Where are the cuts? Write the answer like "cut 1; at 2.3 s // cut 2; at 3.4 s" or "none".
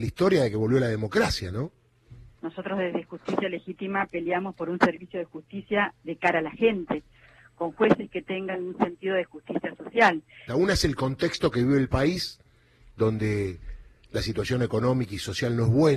cut 1; at 2.3 s // cut 2; at 10.5 s